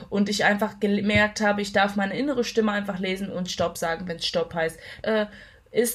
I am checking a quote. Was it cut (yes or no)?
yes